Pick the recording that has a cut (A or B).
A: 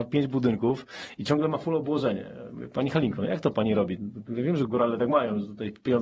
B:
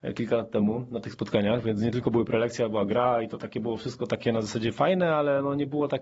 A